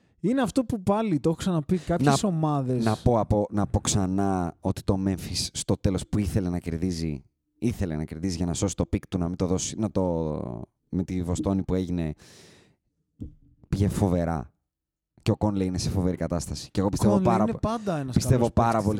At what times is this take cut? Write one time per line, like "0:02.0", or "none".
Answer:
none